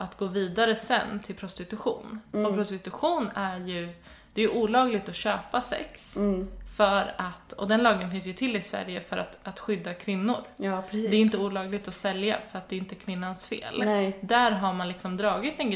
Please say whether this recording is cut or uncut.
uncut